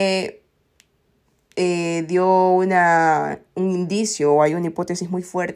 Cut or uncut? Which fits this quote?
uncut